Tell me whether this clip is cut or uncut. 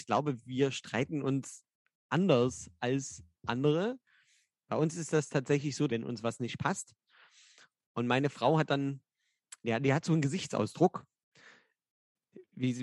cut